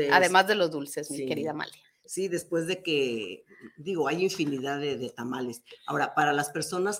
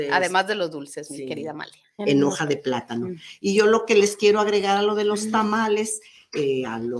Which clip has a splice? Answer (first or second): second